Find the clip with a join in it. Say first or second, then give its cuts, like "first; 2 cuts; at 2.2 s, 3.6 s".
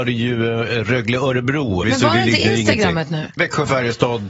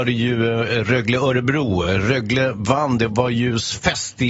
first; 2 cuts; at 1.8 s, 3.4 s